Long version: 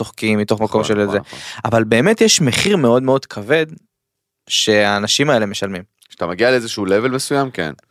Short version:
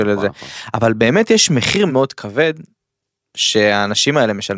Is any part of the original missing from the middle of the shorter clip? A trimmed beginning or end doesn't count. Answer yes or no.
yes